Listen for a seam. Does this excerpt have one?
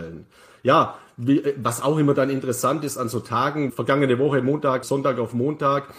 yes; 2 cuts; at 3.7 s, 4.8 s

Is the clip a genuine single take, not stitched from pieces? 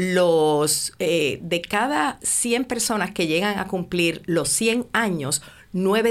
yes; 0 cuts

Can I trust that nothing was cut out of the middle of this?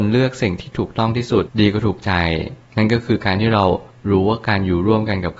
no; 1 cut; at 1.5 s

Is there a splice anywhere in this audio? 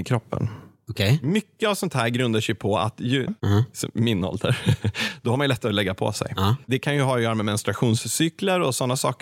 yes; 2 cuts; at 3.3 s, 6.6 s

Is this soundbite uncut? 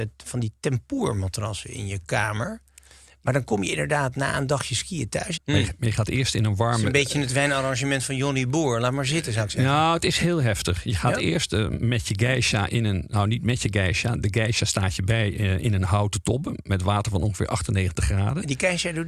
no; 1 cut; at 5.4 s

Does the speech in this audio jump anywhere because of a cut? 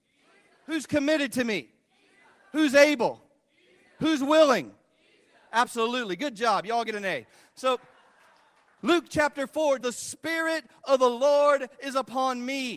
yes; 1 cut; at 9.8 s

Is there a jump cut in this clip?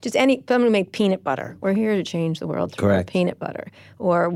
no; 0 cuts

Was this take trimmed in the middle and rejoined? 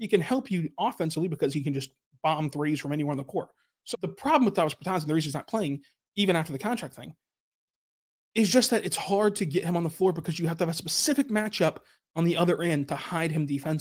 yes; 1 cut; at 3.9 s

